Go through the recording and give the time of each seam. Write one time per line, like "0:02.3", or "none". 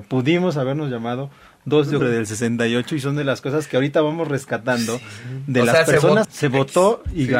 0:02.0
0:06.2

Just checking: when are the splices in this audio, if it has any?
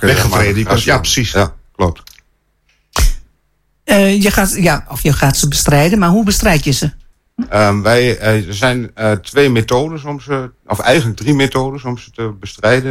none

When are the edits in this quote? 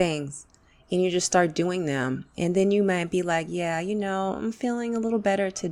none

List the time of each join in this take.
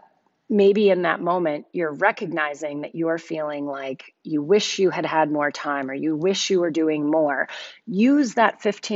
none

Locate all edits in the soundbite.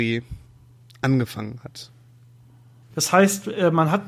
0:02.9

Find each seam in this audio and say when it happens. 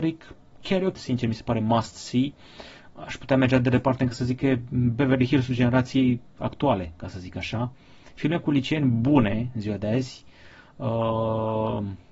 0:01.0

